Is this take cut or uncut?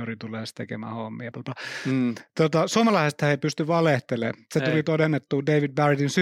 cut